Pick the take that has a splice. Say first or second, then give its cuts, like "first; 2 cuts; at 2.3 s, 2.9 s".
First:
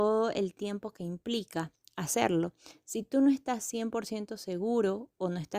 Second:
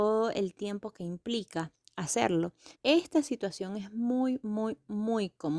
second; 1 cut; at 2.7 s